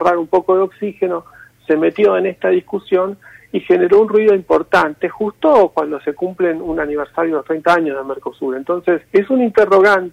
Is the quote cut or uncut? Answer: cut